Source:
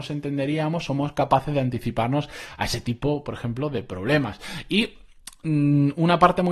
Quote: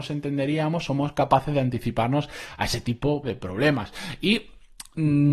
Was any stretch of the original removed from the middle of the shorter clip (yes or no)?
yes